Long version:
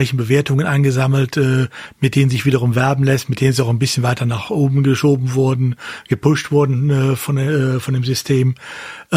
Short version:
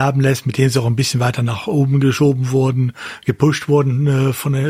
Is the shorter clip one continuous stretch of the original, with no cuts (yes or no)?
yes